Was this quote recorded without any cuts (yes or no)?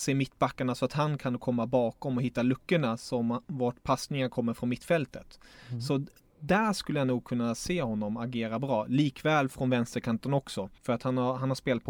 no